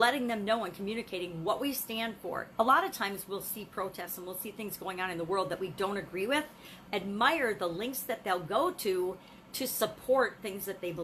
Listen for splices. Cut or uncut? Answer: cut